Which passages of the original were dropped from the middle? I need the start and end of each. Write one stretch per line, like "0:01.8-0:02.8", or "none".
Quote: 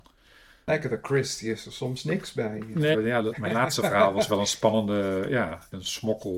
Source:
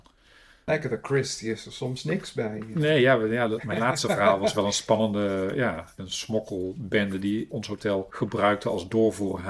0:02.9-0:03.2